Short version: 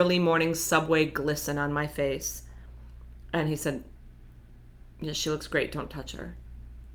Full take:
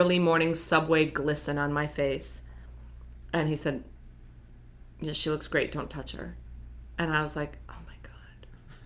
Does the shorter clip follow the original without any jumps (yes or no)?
yes